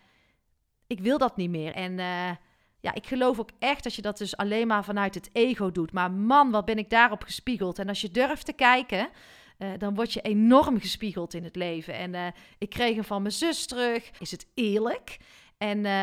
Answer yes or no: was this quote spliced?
yes